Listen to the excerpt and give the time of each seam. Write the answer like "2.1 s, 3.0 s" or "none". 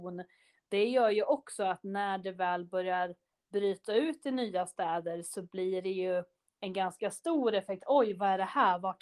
none